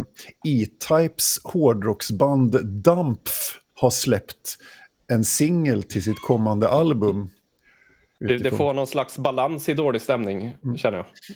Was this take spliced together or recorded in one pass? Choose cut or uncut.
cut